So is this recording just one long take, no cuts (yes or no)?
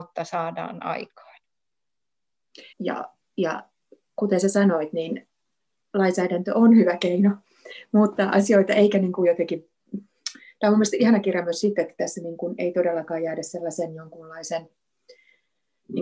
no